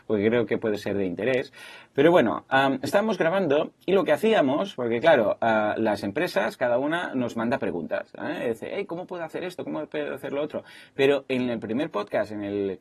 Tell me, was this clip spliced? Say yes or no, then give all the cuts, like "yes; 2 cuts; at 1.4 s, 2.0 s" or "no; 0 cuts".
no; 0 cuts